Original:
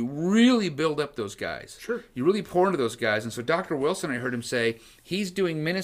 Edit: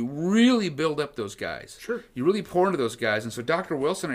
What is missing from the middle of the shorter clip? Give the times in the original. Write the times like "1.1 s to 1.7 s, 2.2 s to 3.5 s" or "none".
none